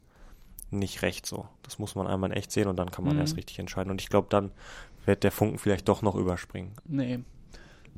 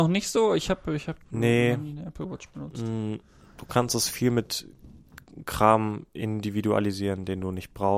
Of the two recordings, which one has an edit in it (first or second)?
first